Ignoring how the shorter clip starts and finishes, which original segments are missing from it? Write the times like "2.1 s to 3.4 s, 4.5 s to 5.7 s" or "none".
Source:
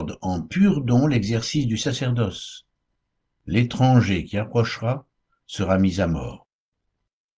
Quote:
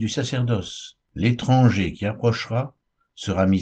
2.7 s to 3.4 s